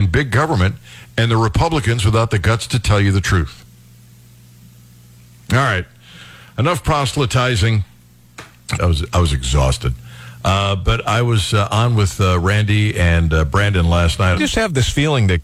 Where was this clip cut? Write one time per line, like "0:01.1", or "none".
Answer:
0:08.8
0:14.4